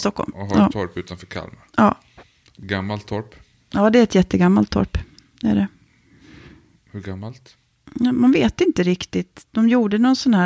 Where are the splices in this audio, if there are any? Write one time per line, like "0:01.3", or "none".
none